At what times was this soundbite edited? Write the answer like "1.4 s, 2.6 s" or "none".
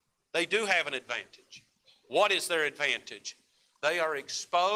none